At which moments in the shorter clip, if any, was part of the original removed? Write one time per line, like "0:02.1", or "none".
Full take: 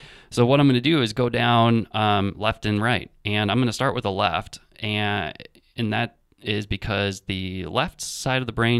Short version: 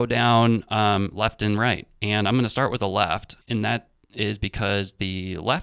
0:03.4